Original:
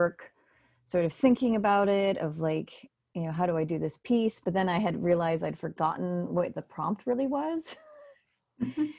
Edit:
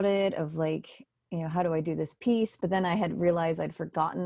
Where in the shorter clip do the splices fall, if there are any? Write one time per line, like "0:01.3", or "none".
none

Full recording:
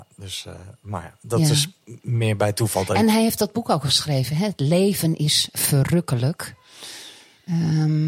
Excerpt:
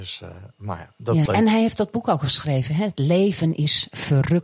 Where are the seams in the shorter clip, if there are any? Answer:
0:01.3

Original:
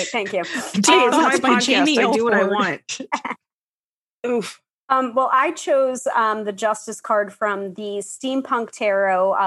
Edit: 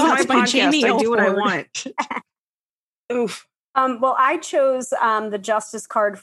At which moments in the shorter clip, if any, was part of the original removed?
none

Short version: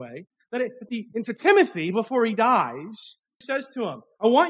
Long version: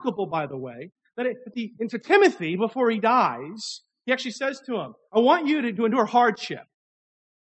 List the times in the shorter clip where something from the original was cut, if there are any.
0:03.4

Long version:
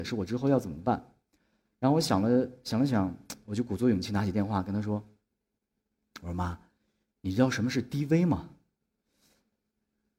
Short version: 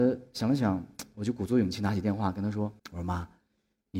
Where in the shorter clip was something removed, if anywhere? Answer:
0:02.8

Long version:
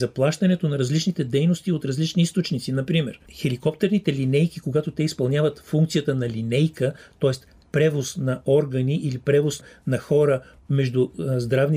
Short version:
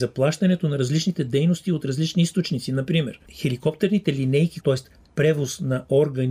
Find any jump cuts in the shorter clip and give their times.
0:04.6

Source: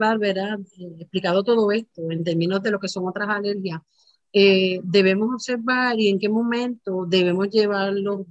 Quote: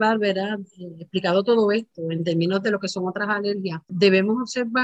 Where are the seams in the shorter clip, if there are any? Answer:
0:03.9

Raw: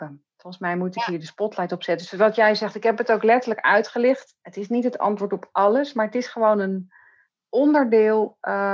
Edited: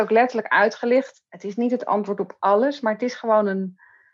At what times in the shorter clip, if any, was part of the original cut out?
none

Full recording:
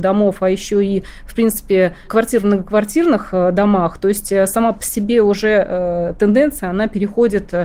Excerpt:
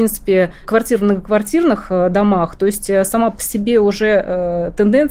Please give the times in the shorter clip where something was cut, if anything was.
none

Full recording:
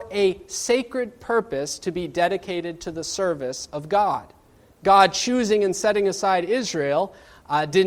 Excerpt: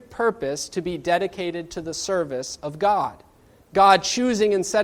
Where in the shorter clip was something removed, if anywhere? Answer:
none

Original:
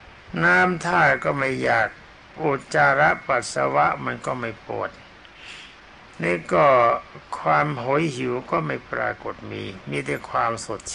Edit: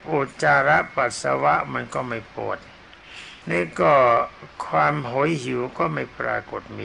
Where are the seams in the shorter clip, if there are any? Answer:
0:03.4

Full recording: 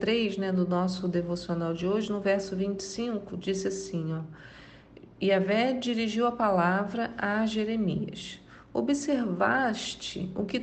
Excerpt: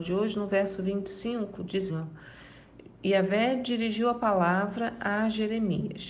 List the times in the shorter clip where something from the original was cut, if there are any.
0:01.9

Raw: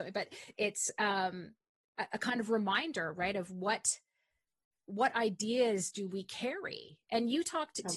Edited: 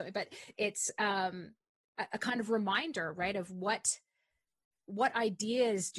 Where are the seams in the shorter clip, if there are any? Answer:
none

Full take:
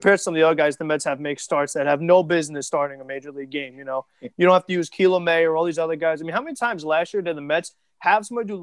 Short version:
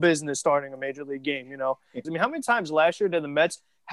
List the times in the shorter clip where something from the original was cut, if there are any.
0:02.0

